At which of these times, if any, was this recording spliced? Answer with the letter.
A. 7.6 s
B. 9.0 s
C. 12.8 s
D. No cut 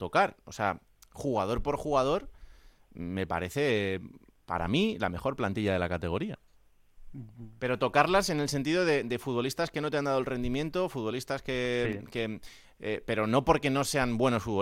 A